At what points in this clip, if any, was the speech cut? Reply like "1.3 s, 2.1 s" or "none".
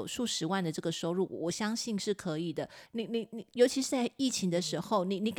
2.9 s